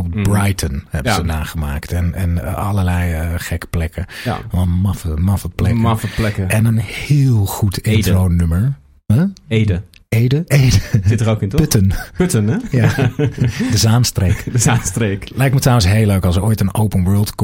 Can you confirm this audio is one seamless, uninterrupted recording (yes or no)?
yes